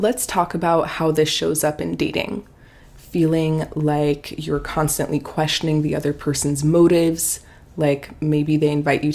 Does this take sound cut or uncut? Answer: cut